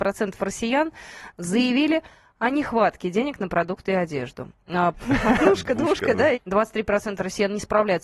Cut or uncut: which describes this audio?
cut